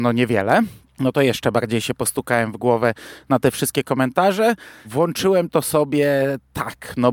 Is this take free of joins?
no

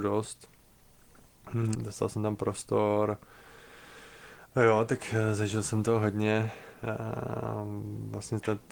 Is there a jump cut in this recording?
yes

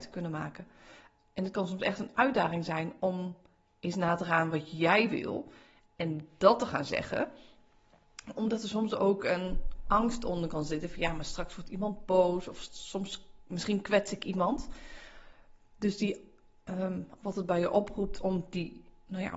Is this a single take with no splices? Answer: no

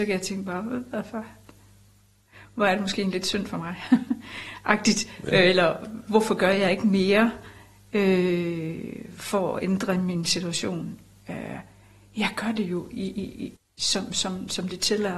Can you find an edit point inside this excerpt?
yes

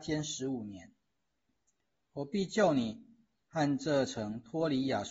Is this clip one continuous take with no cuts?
yes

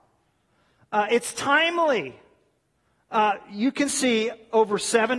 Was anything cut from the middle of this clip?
no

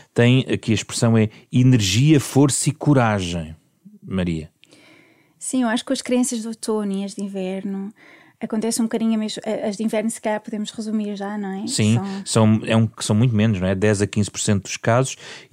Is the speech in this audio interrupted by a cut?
no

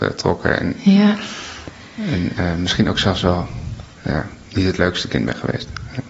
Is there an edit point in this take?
no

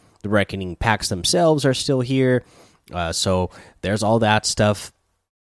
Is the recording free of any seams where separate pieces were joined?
yes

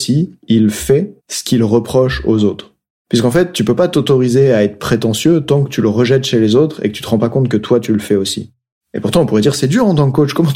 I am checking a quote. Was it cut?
yes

